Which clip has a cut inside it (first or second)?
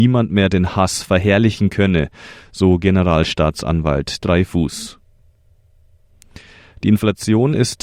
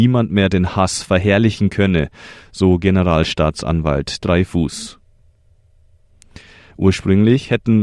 second